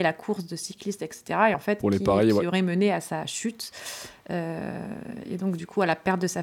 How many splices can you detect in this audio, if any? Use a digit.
0